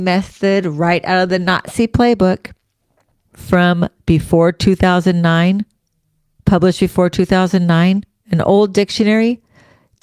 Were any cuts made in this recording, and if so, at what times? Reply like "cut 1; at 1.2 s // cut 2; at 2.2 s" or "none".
cut 1; at 3.2 s